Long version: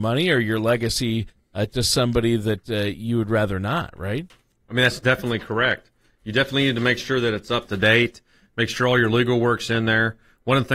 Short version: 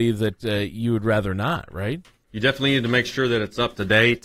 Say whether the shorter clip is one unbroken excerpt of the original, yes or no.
no